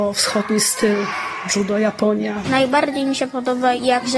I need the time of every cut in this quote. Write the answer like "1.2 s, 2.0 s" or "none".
2.4 s